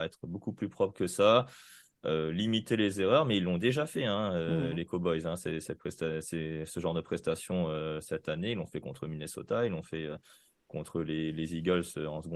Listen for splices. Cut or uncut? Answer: uncut